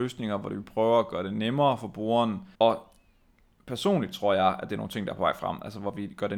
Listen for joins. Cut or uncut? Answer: cut